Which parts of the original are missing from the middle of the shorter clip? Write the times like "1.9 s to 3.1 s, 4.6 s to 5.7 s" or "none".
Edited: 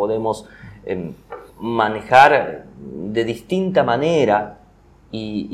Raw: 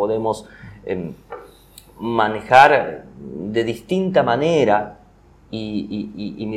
1.5 s to 1.9 s